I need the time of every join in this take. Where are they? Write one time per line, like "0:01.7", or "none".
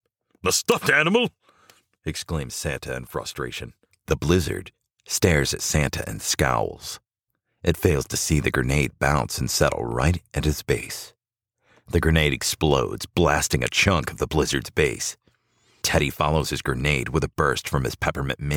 0:03.9